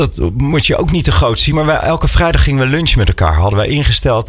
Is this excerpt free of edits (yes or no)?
yes